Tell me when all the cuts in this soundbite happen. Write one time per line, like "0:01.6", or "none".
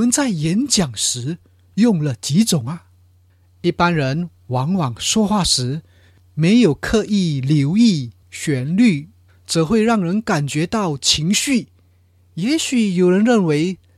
0:09.3